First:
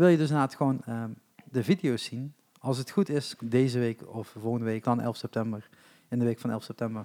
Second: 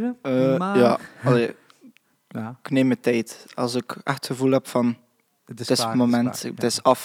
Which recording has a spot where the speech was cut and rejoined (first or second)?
first